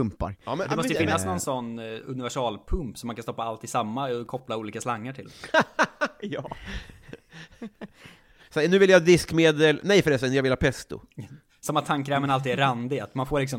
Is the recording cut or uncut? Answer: cut